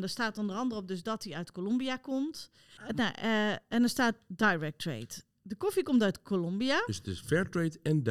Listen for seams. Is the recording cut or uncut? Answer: cut